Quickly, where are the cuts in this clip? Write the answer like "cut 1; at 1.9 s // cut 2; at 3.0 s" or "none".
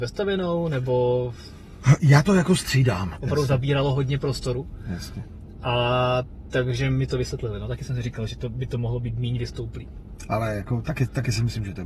cut 1; at 3.1 s